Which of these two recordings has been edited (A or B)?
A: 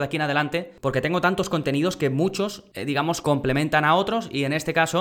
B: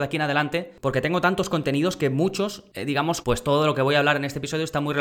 B